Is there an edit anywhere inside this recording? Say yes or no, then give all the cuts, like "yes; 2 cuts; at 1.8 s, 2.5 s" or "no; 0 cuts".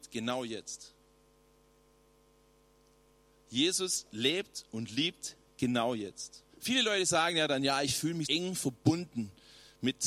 yes; 2 cuts; at 6.5 s, 8.2 s